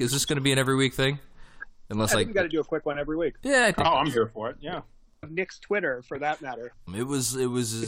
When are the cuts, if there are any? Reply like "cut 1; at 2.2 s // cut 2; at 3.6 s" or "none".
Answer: cut 1; at 5.2 s // cut 2; at 6.9 s